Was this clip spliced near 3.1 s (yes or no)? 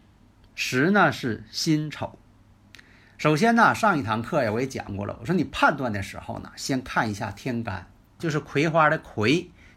no